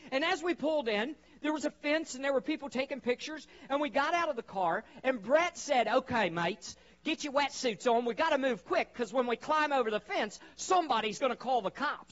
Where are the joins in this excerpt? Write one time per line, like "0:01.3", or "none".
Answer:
none